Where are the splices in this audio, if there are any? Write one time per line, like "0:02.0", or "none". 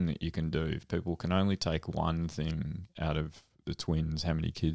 0:03.6